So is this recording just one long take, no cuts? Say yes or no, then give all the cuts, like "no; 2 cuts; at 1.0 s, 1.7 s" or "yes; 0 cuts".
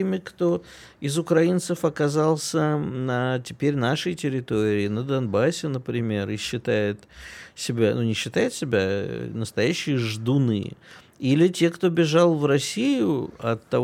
yes; 0 cuts